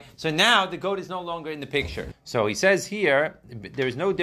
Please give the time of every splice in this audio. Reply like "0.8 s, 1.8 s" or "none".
2.1 s